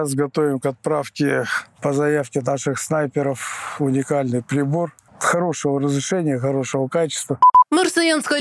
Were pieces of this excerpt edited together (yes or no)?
no